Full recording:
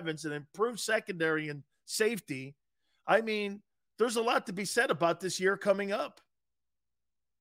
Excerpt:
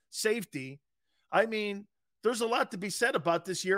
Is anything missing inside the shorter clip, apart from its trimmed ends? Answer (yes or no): no